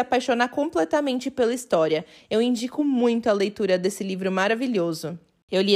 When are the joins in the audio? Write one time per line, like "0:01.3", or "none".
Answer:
none